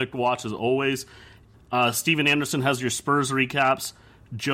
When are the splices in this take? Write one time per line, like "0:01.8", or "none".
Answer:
0:01.5